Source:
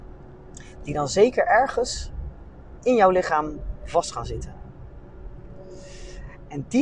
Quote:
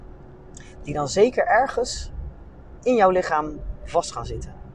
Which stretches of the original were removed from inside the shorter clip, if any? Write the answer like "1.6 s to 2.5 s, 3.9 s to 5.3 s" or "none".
none